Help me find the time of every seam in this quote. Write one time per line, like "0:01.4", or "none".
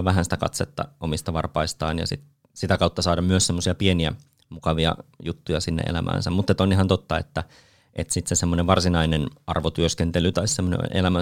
none

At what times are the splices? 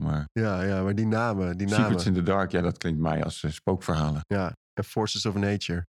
none

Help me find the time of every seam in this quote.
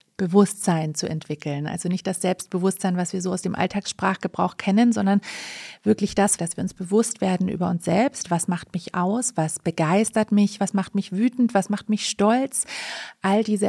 0:06.4
0:10.6

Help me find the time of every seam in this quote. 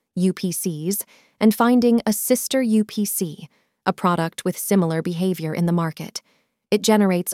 none

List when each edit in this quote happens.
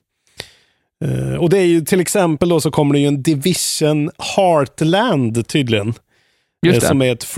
none

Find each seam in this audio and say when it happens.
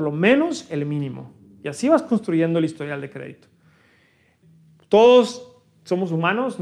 none

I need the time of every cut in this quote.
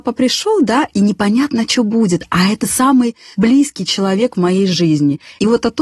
none

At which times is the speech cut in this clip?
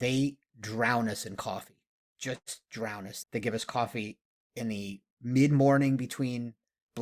0:03.2
0:05.1

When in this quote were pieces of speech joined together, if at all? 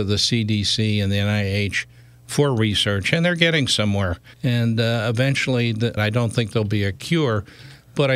0:04.3
0:06.0

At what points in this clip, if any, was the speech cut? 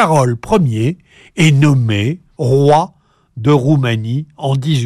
0:02.3

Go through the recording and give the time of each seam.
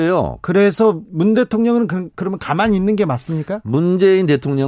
0:01.0

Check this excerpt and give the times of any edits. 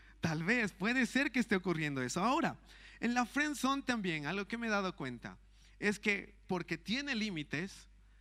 none

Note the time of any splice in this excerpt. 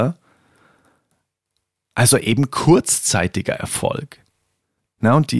none

